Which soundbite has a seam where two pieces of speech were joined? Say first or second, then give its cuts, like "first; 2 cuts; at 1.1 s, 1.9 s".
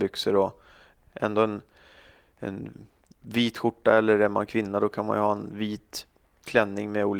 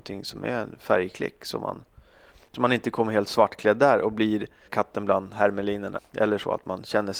second; 2 cuts; at 4.7 s, 6.0 s